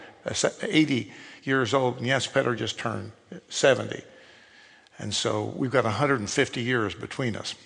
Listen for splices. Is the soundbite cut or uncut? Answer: uncut